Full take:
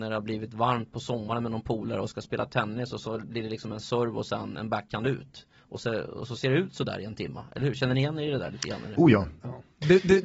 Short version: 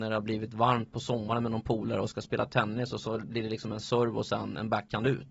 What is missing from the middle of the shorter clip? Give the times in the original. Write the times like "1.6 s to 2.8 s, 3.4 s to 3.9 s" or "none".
none